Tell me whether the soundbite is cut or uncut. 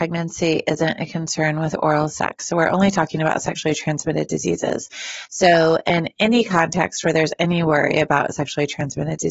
uncut